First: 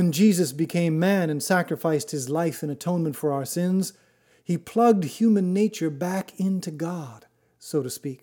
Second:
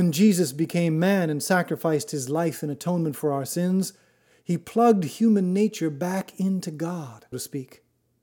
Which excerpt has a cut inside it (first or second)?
second